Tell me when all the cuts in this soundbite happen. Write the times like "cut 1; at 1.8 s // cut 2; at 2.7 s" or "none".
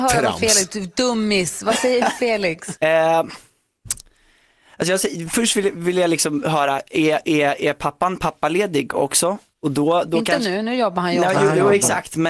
cut 1; at 2.8 s

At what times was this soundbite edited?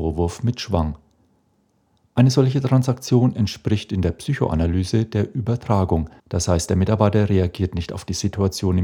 cut 1; at 6.2 s

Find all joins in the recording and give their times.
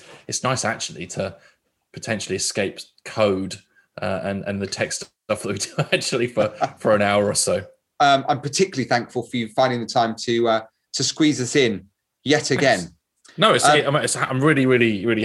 cut 1; at 8.0 s

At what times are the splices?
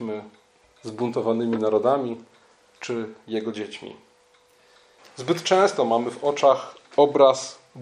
cut 1; at 5.0 s

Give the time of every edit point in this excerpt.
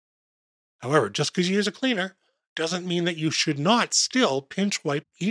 none

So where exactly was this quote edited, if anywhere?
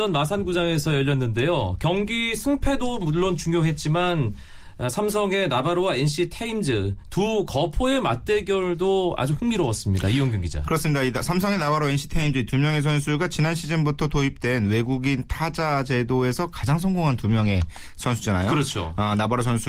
none

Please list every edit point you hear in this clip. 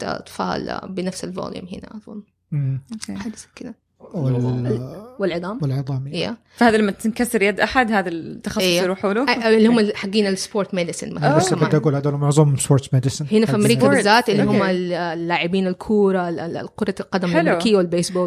cut 1; at 3.9 s

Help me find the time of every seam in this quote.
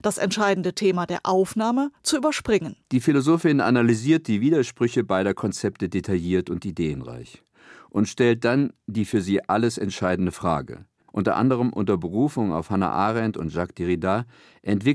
cut 1; at 2.8 s // cut 2; at 11.1 s

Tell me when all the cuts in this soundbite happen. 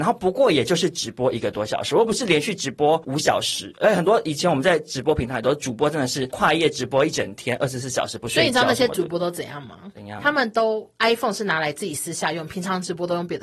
none

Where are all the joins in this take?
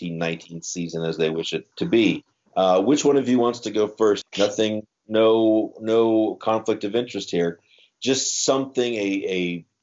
cut 1; at 1.7 s // cut 2; at 4.2 s

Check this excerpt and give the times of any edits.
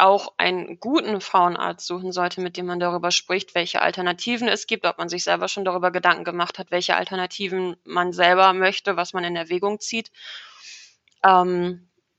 none

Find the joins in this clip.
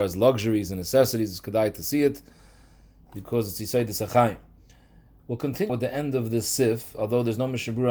cut 1; at 5.7 s

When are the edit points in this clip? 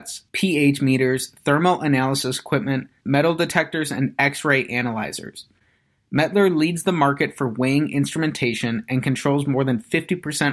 cut 1; at 3.0 s

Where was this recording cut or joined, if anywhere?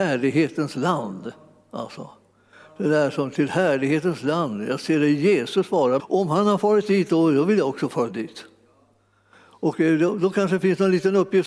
cut 1; at 6.0 s

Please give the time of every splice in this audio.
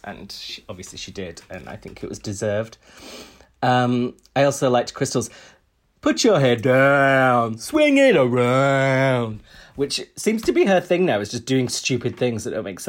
none

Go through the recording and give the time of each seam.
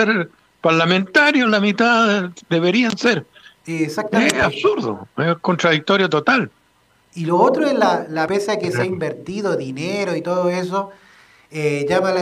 cut 1; at 3.6 s // cut 2; at 8.3 s

